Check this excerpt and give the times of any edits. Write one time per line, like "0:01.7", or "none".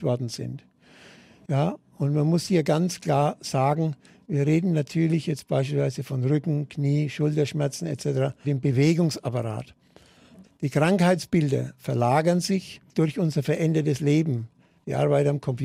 0:08.4
0:10.4